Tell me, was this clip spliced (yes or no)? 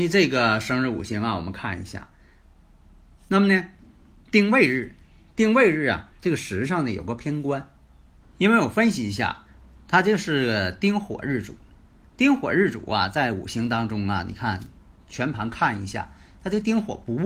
yes